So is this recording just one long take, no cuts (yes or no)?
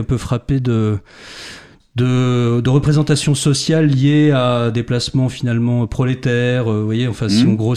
yes